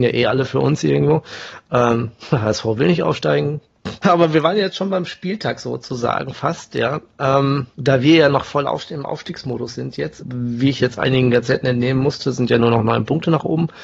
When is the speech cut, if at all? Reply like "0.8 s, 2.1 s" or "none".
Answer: 4.0 s, 7.7 s, 10.2 s